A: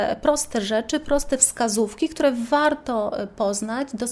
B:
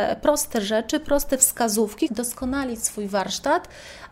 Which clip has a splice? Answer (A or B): B